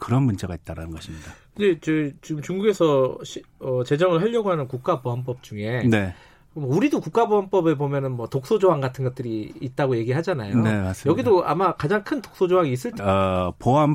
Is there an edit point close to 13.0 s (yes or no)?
yes